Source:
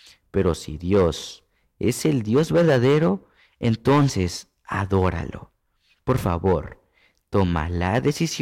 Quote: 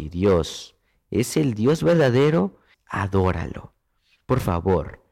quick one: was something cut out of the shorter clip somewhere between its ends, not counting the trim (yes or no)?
yes